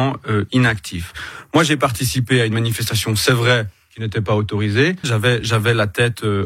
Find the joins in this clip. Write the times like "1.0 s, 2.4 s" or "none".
5.0 s